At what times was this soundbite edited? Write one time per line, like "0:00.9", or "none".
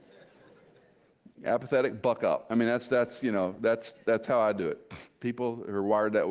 none